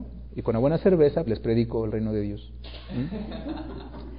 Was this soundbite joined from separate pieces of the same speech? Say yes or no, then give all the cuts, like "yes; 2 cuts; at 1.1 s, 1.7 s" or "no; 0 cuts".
yes; 1 cut; at 1.3 s